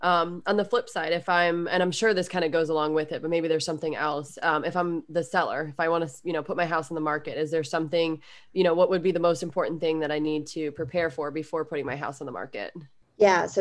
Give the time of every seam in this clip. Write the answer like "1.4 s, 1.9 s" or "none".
none